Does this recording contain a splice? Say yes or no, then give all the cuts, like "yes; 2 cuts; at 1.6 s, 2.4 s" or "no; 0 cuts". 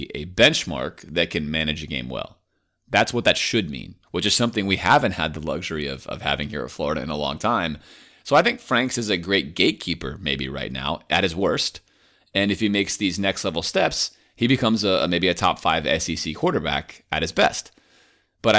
yes; 1 cut; at 4.0 s